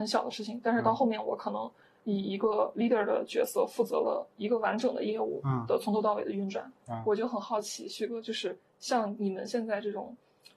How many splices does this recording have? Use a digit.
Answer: 1